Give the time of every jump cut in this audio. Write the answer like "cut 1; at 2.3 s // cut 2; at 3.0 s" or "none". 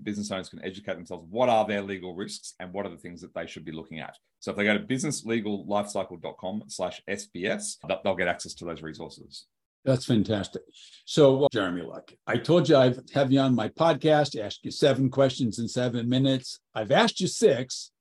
none